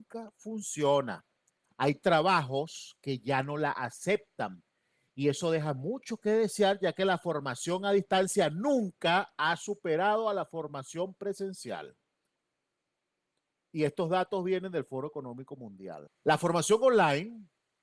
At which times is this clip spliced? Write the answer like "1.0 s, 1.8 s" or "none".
16.1 s